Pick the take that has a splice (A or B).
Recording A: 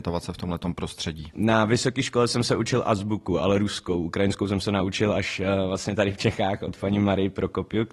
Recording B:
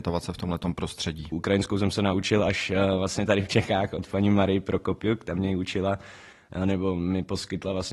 B